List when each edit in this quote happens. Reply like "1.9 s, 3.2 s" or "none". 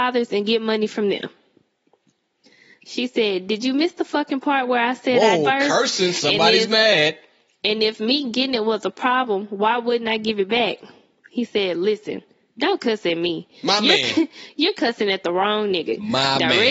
5.4 s